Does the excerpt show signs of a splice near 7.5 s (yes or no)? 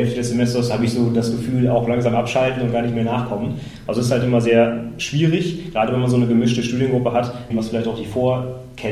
yes